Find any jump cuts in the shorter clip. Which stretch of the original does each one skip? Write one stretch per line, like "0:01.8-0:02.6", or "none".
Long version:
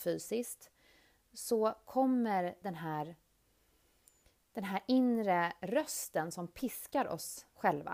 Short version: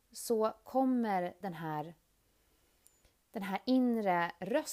none